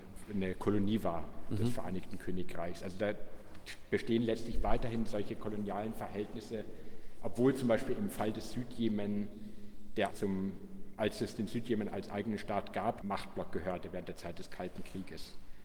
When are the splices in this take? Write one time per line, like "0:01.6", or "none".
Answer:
0:10.1
0:13.0

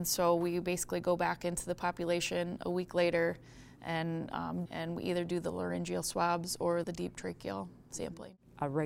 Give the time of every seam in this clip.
0:04.7
0:06.8

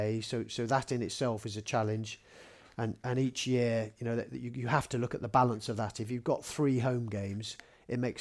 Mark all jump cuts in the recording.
none

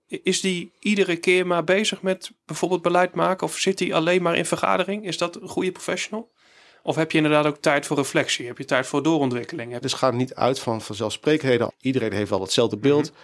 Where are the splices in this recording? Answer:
0:09.8
0:11.7

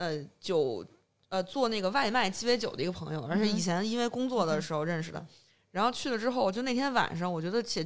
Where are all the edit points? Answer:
none

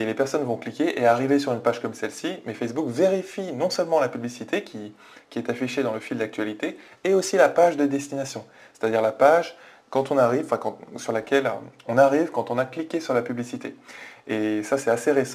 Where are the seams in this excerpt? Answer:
none

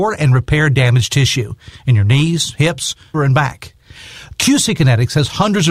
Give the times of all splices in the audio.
0:03.1
0:04.3

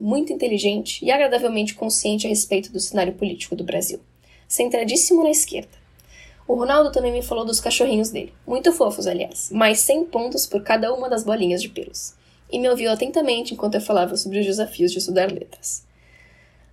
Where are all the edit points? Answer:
none

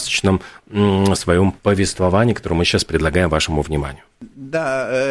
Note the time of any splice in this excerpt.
0:04.1

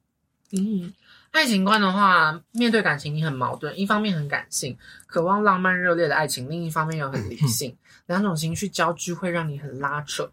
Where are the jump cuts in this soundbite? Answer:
0:02.5

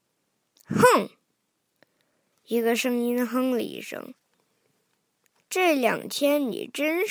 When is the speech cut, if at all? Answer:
none

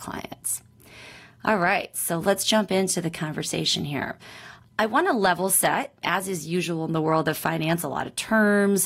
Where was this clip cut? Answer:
0:02.2
0:07.8

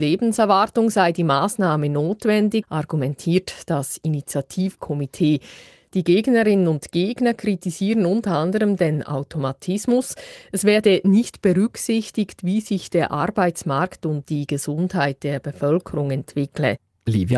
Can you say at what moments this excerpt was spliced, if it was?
0:02.6

